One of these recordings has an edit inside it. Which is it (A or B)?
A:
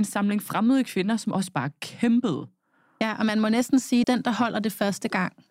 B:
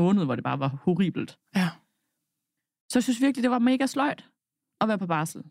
A